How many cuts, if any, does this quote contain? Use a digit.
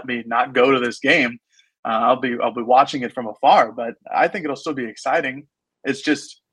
0